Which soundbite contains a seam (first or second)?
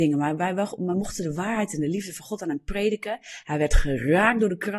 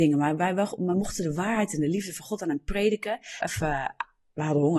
second